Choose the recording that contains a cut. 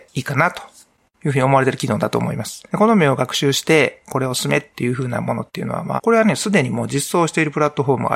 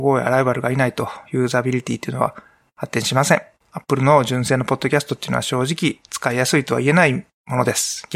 first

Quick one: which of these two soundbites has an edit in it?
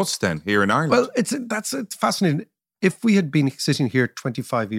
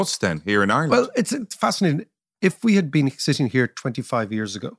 second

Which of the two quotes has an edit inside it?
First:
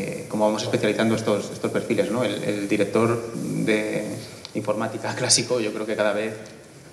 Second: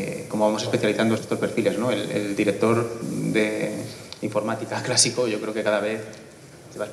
second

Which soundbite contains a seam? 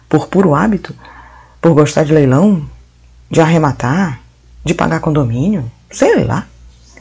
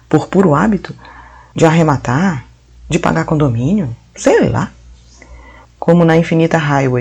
second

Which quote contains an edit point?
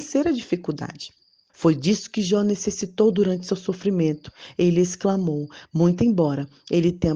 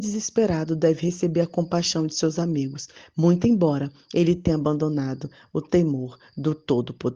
first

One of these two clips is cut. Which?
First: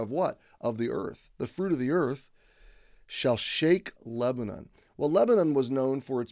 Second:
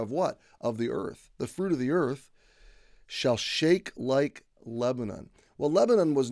first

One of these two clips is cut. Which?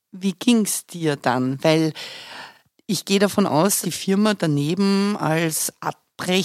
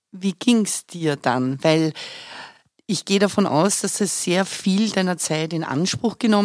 first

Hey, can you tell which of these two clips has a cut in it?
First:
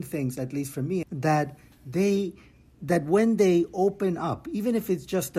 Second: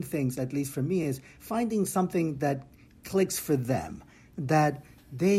first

